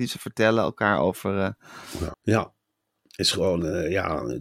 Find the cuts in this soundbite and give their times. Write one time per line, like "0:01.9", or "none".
0:02.1